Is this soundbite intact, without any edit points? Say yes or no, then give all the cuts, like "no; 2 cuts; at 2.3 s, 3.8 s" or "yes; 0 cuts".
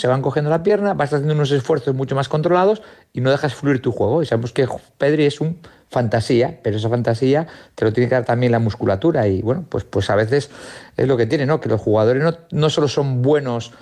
yes; 0 cuts